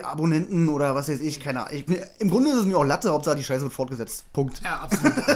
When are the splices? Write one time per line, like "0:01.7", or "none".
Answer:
0:01.9